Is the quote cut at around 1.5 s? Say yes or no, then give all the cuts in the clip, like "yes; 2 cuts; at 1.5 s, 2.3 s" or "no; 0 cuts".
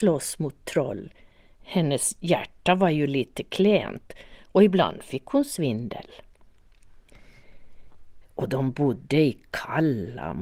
no; 1 cut; at 8.2 s